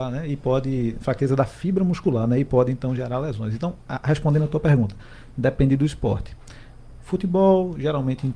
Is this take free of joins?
yes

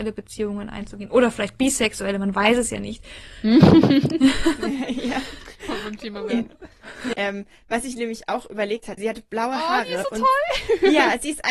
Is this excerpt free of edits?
no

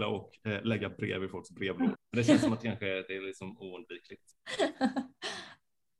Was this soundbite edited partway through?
yes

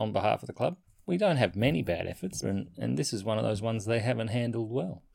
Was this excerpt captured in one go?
no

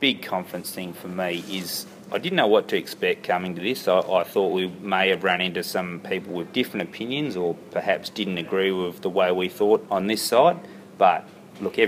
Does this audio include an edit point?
no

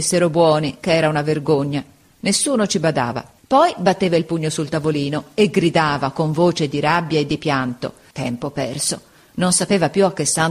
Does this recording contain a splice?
yes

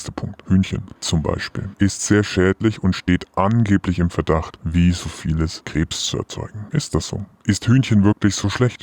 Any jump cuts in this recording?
no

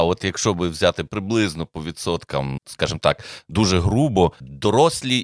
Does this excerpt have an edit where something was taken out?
yes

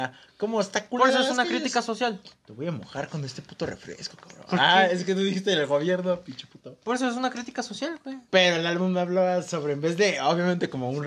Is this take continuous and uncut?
no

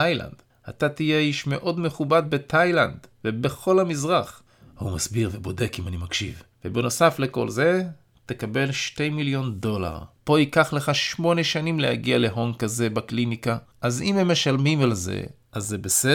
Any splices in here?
yes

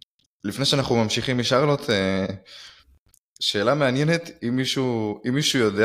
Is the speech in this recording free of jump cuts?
yes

